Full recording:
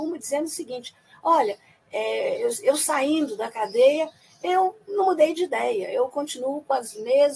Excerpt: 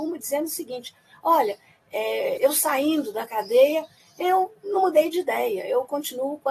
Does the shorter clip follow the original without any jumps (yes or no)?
no